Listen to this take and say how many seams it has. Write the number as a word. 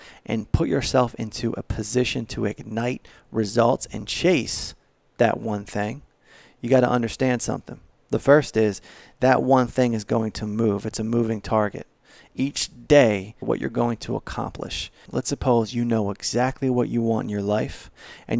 two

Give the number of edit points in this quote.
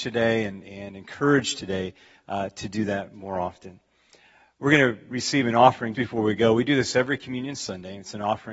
one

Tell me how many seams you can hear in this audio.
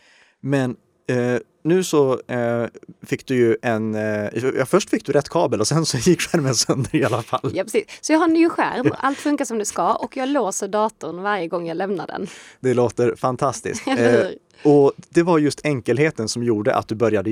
zero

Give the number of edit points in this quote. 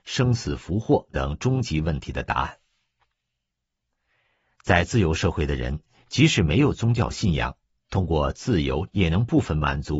two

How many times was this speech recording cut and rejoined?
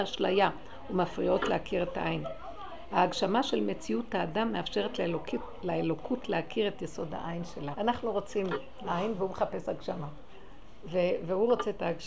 one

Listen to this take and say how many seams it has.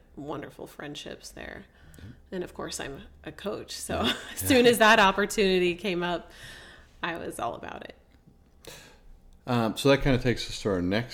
zero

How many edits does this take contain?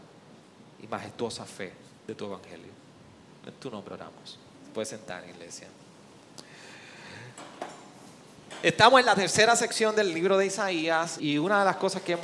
two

